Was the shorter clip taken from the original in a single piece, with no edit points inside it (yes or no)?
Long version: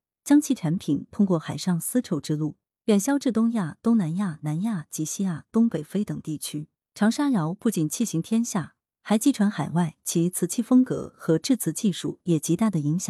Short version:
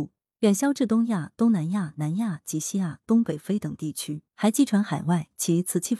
no